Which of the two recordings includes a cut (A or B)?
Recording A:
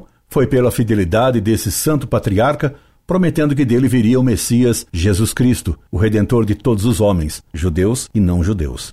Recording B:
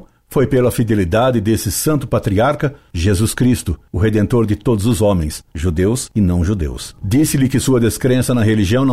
B